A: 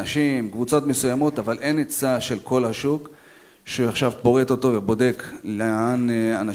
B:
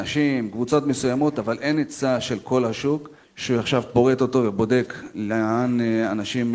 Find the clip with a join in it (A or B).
B